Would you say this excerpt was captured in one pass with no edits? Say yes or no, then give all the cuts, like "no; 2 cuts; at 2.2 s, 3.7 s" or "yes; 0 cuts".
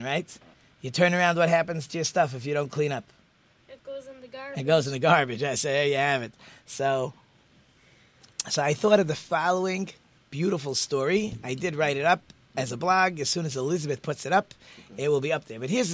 yes; 0 cuts